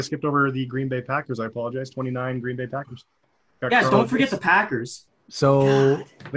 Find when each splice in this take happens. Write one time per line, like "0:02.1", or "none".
none